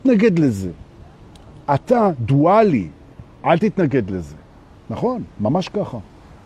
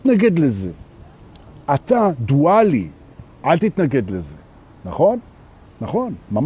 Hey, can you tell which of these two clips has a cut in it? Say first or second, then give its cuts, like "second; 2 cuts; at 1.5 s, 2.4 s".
first; 1 cut; at 4.7 s